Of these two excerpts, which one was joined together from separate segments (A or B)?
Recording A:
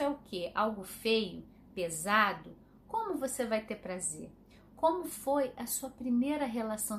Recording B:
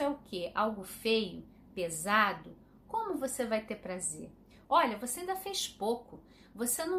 B